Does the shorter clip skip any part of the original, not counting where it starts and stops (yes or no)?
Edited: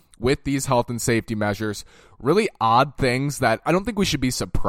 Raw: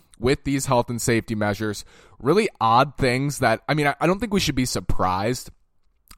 yes